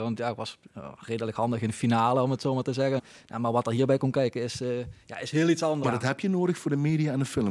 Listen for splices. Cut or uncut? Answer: cut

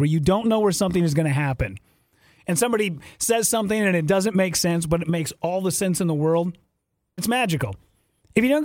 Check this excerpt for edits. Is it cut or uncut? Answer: cut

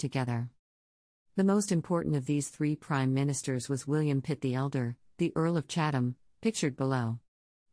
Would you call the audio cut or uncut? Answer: uncut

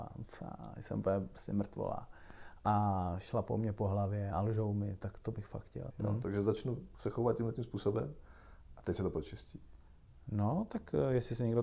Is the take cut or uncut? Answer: cut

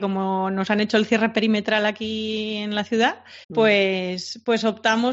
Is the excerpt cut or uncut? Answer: cut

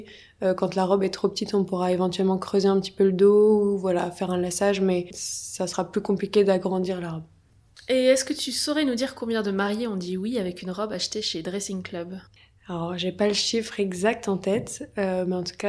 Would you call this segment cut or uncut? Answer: uncut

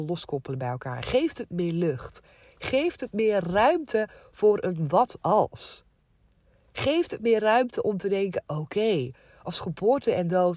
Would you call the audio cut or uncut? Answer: uncut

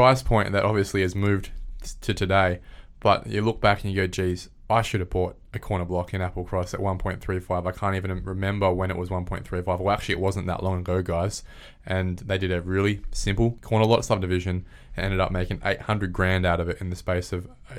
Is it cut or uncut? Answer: uncut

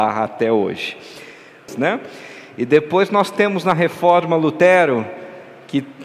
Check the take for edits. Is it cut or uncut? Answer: cut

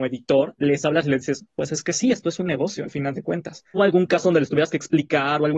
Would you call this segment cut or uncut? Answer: cut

